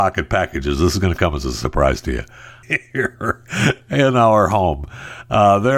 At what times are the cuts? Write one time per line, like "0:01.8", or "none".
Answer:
0:02.6

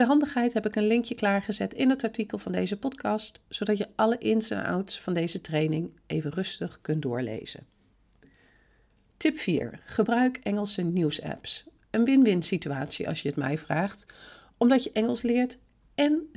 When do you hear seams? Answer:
none

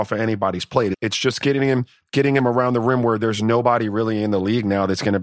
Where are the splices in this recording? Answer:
0:00.9

